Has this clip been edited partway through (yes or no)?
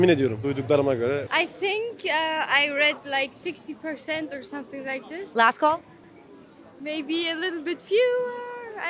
no